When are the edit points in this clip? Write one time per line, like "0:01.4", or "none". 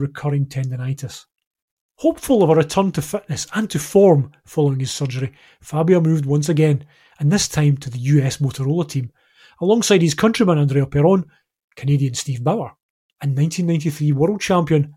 none